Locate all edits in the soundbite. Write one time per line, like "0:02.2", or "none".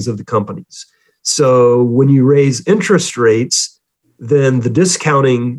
none